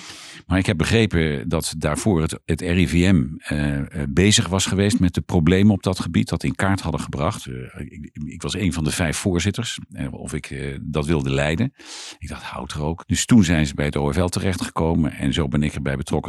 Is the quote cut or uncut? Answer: cut